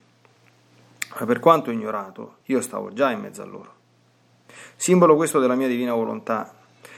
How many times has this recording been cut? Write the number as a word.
one